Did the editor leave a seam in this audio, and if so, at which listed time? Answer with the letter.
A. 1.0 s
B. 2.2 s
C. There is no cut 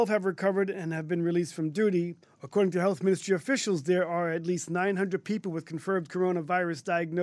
B